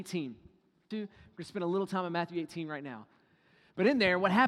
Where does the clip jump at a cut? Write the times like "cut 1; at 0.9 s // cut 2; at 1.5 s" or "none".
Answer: cut 1; at 0.9 s